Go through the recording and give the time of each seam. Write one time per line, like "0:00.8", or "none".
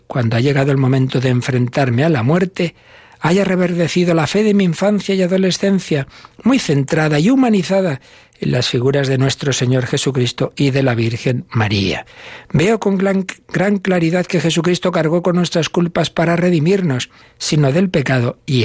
0:17.2